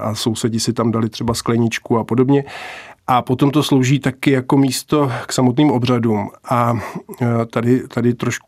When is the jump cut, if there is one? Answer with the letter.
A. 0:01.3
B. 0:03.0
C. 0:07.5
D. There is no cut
B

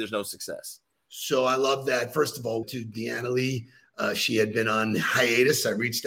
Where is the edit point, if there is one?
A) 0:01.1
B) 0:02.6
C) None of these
B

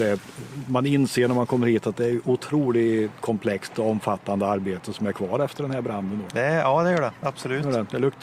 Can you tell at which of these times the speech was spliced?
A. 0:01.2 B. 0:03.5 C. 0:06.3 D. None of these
C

